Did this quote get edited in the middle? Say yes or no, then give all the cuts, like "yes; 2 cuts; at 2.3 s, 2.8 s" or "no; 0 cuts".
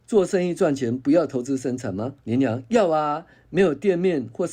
yes; 1 cut; at 2.2 s